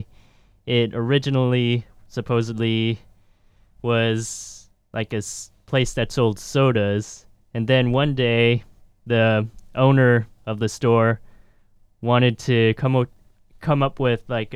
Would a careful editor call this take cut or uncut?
uncut